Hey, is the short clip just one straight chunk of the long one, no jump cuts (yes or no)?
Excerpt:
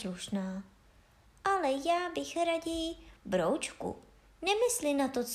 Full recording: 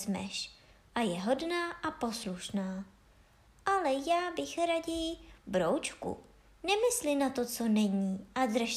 yes